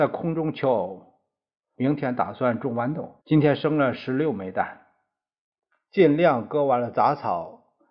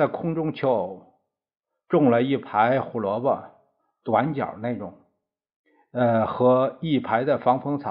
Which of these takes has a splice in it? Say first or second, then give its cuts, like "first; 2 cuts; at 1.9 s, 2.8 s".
first; 3 cuts; at 1.7 s, 3.2 s, 5.9 s